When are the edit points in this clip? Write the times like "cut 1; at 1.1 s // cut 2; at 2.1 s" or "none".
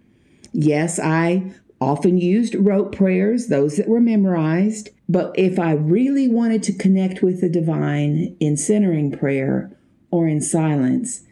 cut 1; at 5.0 s